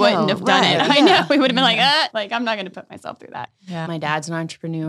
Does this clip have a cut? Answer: yes; 2 cuts; at 2.1 s, 3.9 s

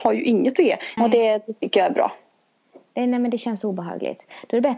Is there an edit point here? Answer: yes; 1 cut; at 1.0 s

